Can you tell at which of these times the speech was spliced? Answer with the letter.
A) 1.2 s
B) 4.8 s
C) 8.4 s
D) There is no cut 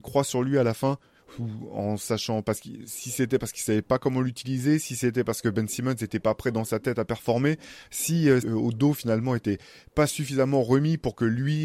C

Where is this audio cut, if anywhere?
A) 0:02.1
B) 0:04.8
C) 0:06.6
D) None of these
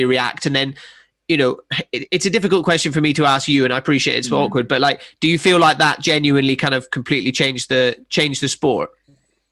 D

